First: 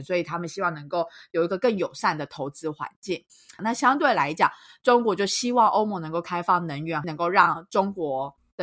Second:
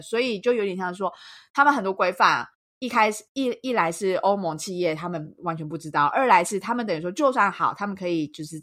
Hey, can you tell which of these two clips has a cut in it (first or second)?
first